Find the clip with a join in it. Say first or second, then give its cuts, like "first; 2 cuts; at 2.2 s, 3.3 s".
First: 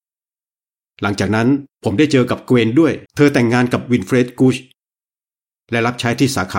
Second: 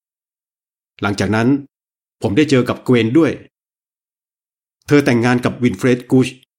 first; 2 cuts; at 1.7 s, 3.1 s